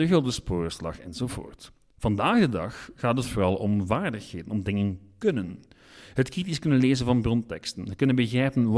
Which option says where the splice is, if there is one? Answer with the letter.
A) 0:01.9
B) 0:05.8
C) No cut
C